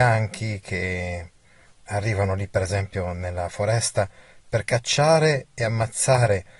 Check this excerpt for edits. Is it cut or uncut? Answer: uncut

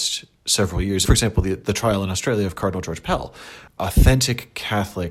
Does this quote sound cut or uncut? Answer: cut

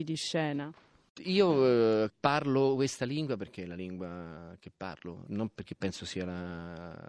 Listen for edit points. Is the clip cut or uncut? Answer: uncut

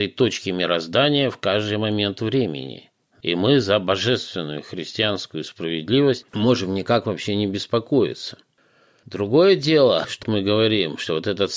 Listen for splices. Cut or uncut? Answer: cut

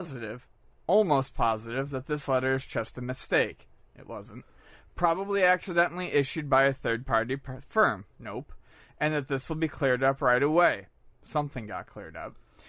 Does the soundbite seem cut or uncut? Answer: uncut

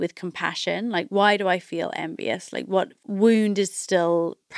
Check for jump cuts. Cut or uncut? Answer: uncut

